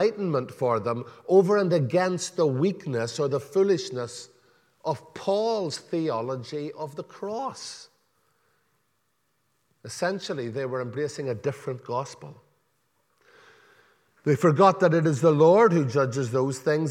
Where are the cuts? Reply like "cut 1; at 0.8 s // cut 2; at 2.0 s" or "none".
none